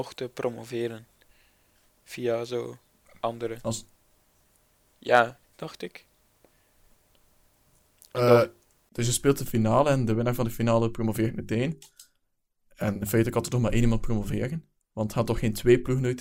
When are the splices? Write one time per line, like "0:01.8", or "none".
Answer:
0:05.4